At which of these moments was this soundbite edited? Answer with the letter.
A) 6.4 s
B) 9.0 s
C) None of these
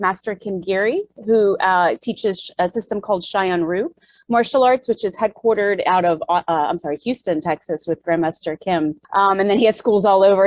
B